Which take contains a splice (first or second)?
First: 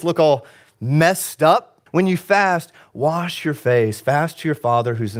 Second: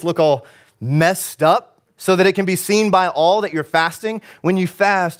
first